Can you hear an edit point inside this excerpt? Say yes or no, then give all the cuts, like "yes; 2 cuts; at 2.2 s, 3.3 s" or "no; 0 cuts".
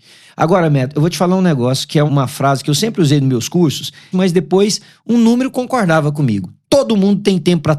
yes; 2 cuts; at 2.1 s, 4.1 s